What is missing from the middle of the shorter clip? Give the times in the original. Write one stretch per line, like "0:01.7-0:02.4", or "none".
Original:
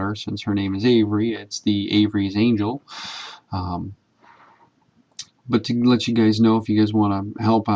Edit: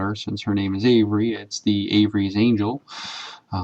none